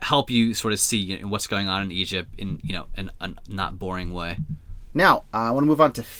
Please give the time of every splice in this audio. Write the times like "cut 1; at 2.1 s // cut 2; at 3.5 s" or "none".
cut 1; at 4.9 s